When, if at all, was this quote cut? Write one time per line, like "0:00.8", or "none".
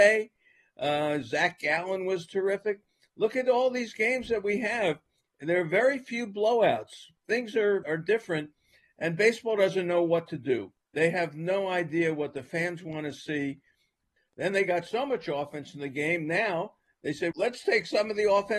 0:07.8
0:14.2
0:17.3